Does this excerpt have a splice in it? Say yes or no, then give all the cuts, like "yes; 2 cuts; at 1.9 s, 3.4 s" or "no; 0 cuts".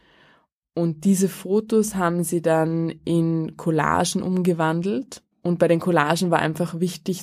yes; 1 cut; at 5.3 s